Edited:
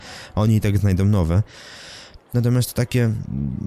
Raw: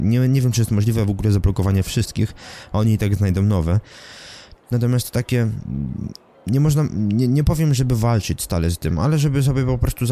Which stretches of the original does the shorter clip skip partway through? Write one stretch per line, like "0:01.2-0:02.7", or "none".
none